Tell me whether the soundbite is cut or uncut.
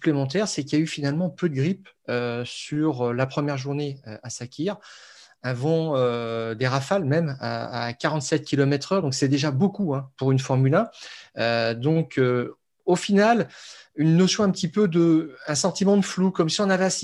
uncut